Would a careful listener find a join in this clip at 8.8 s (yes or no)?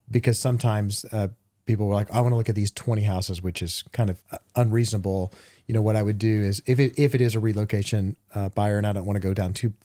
no